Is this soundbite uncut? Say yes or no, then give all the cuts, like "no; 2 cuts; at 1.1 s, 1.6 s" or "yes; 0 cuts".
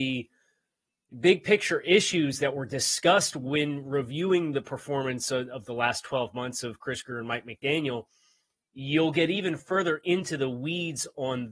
yes; 0 cuts